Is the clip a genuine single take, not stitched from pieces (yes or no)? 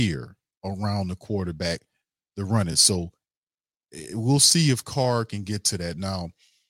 yes